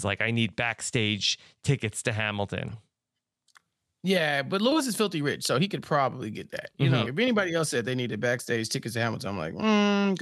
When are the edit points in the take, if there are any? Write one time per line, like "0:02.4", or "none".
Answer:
0:07.0